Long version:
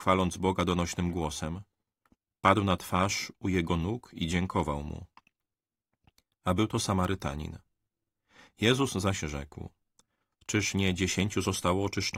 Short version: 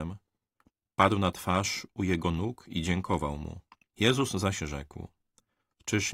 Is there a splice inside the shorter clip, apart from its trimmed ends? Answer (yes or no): yes